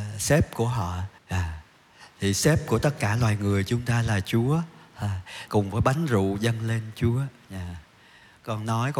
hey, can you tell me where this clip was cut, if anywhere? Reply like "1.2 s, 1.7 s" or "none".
1.2 s, 5.5 s